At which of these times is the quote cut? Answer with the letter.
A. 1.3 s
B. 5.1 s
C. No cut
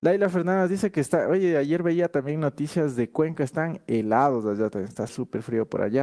B